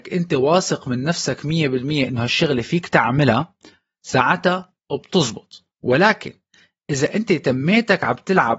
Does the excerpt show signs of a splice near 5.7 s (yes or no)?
yes